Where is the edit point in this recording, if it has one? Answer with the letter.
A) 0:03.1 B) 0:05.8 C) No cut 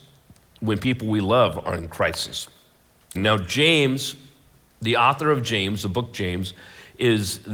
A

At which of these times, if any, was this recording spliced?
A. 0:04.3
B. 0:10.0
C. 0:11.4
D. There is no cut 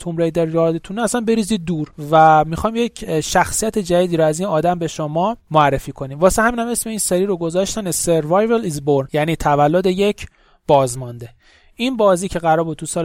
D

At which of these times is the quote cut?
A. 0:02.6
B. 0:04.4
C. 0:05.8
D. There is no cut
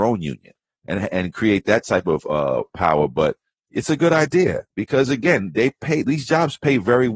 D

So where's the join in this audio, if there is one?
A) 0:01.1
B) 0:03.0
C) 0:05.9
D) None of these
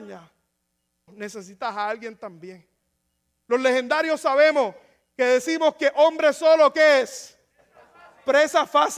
A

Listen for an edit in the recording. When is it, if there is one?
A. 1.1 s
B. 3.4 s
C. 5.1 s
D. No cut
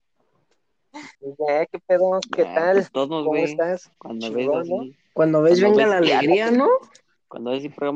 A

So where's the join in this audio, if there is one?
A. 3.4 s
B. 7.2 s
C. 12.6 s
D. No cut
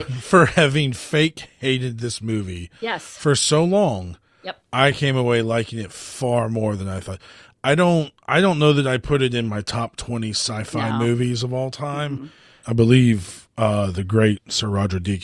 C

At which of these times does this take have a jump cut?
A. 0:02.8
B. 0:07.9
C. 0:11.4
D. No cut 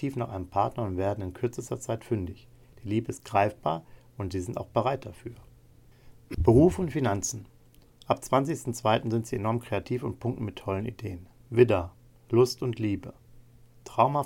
C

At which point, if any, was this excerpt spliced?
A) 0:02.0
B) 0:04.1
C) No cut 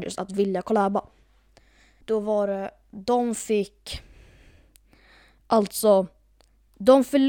A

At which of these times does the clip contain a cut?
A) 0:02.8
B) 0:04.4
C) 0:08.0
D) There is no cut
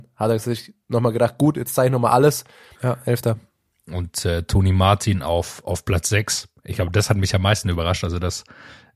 A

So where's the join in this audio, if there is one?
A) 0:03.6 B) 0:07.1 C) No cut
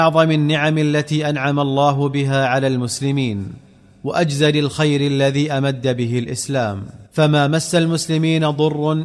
B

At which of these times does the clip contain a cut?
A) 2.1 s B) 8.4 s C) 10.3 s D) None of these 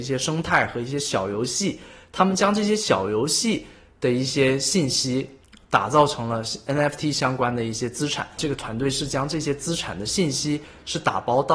B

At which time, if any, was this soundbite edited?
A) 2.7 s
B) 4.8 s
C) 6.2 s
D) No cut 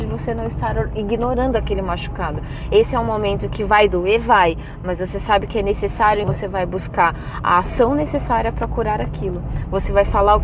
C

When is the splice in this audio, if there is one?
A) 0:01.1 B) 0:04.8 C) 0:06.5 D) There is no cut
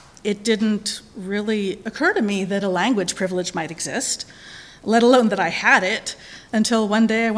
C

